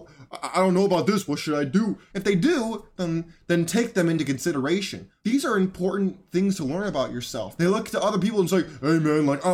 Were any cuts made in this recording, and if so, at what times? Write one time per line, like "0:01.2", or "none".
0:02.1
0:05.2
0:07.6